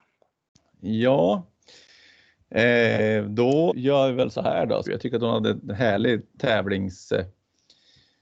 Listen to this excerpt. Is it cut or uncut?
cut